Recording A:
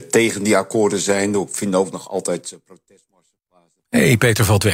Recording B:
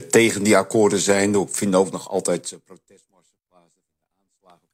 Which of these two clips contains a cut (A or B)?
A